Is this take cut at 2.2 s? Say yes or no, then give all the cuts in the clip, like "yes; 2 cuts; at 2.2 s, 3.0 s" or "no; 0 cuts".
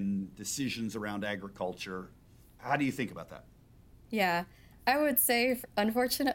no; 0 cuts